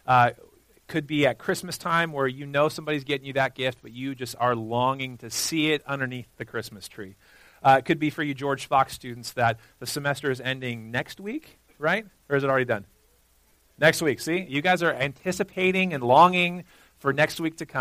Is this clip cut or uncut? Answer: uncut